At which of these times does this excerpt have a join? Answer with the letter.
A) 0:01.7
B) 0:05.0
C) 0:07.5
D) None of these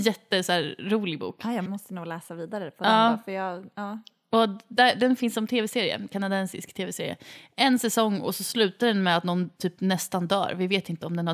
A